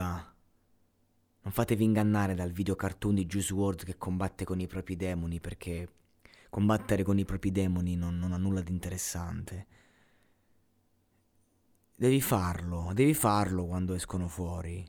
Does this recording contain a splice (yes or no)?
no